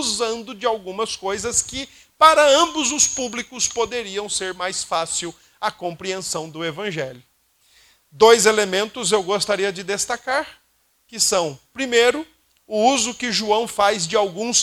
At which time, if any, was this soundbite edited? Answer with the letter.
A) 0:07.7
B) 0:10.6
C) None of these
C